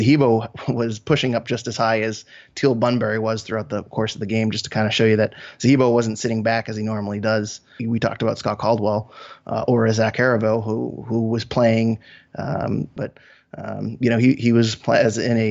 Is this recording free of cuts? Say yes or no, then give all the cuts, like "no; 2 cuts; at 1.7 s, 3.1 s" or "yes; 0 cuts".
no; 2 cuts; at 7.8 s, 13.0 s